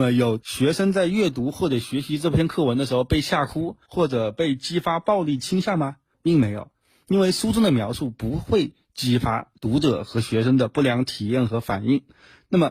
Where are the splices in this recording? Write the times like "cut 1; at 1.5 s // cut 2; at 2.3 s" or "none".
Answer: none